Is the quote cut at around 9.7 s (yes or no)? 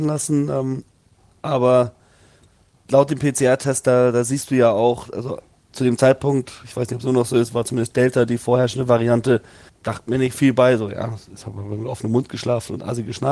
yes